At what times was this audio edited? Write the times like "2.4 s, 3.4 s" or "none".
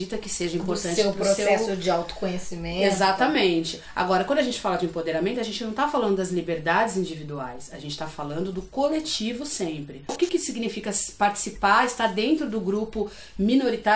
none